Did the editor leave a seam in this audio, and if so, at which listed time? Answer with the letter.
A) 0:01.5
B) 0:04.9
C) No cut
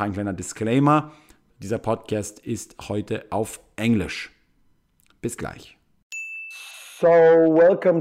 A